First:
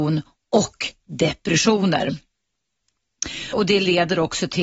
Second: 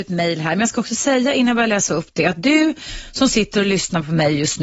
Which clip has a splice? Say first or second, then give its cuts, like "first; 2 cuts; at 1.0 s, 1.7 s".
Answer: first; 1 cut; at 3.5 s